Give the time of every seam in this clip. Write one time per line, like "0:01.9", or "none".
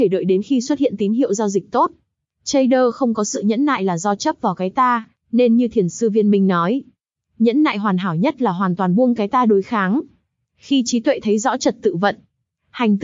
none